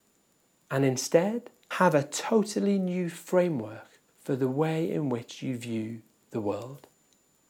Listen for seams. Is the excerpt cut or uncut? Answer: cut